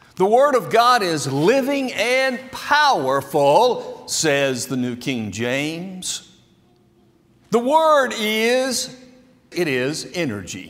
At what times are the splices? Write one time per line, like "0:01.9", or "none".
0:09.5